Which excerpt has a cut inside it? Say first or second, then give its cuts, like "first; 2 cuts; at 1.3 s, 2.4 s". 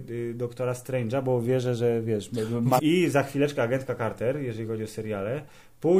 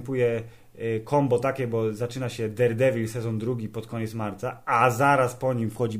first; 1 cut; at 2.8 s